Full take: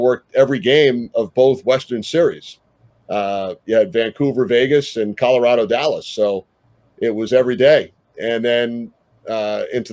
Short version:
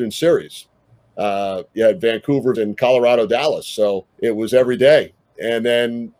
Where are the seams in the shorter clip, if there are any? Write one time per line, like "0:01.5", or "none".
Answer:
0:02.5
0:04.1

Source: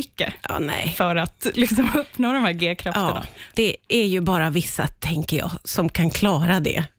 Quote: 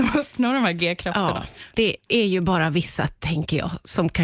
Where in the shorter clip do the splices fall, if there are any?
none

